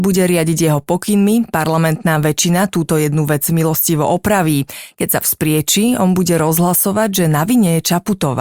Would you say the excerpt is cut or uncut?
uncut